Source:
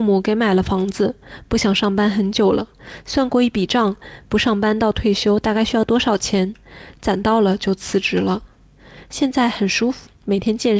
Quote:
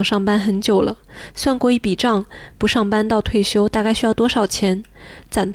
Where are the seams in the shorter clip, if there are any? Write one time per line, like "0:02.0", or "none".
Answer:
none